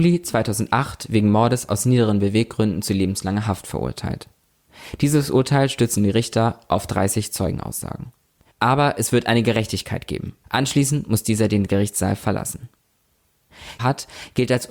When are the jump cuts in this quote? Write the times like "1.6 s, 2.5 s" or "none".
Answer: 8.5 s, 10.4 s, 13.8 s

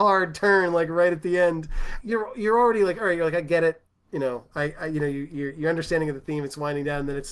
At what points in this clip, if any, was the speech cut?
2.0 s

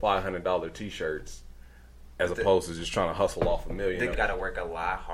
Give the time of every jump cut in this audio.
4.1 s

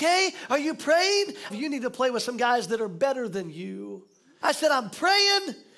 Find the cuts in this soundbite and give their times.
1.5 s, 4.4 s

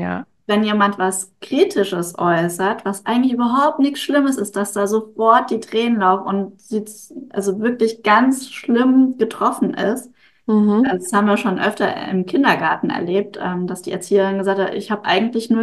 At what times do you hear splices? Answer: none

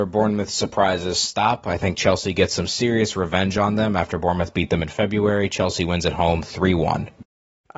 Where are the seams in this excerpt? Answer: none

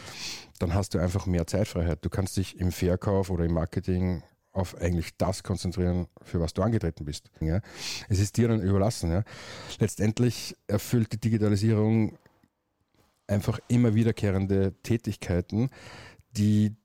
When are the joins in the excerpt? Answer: 7.4 s

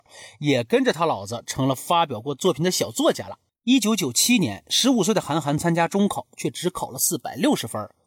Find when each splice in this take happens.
none

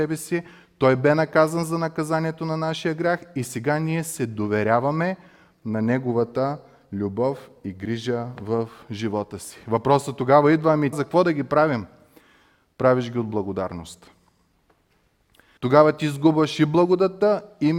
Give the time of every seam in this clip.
10.9 s, 15.6 s

